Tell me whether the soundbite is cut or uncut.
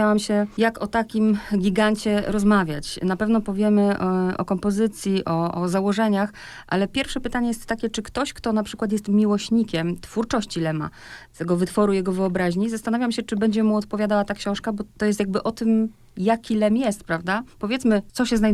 uncut